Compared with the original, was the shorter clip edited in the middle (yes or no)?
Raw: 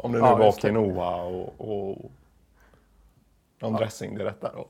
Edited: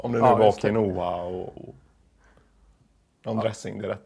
yes